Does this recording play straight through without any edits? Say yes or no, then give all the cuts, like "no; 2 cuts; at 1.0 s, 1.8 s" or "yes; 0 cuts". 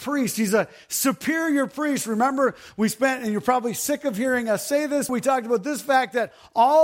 no; 1 cut; at 5.1 s